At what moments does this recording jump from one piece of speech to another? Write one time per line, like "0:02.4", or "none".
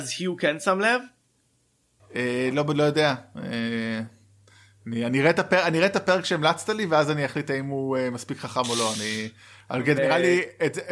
0:10.0